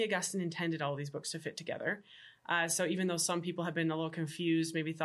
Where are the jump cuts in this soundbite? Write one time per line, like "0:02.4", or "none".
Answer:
none